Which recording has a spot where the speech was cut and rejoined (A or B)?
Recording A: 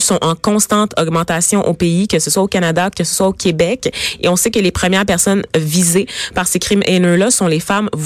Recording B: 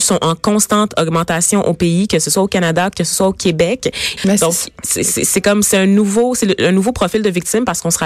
B